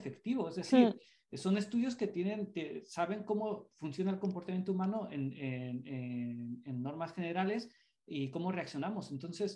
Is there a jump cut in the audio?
no; 0 cuts

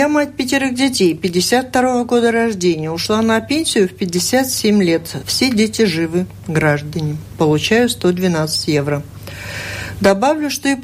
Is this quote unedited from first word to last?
no; 1 cut; at 5.2 s

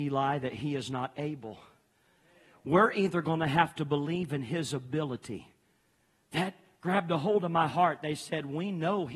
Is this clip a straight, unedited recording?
yes; 0 cuts

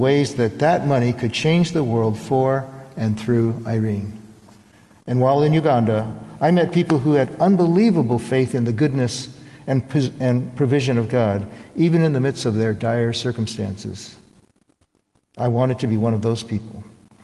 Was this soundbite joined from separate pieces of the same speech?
no; 0 cuts

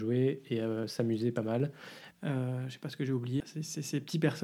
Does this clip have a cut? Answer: yes; 2 cuts; at 2.1 s, 3.4 s

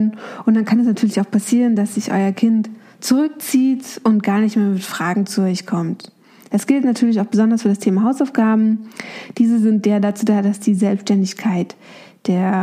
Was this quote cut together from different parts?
no; 0 cuts

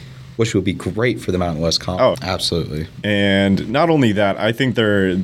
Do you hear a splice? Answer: yes; 1 cut; at 2.1 s

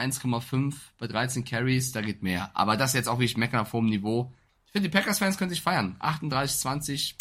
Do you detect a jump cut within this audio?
no; 0 cuts

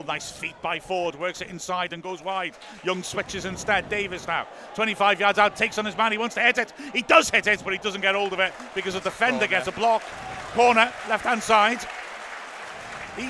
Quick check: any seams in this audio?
no; 0 cuts

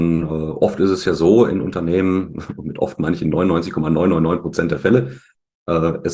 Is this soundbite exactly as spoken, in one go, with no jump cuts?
yes; 0 cuts

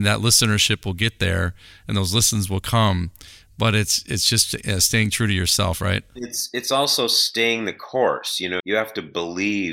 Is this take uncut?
no; 1 cut; at 8.6 s

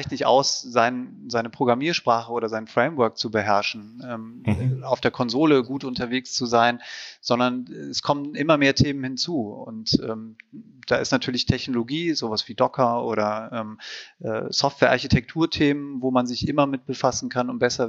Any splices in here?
no; 0 cuts

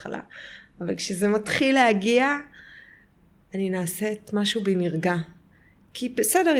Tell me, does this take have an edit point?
no; 0 cuts

